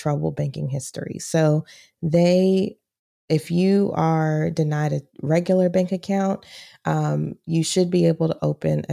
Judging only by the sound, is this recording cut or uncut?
uncut